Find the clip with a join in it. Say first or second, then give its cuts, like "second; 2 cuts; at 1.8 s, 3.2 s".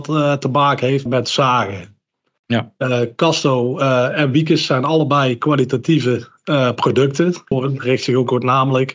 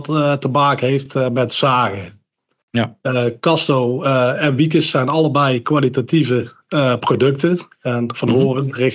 first; 2 cuts; at 1.1 s, 7.5 s